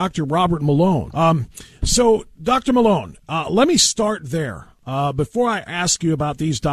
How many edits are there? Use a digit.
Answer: 1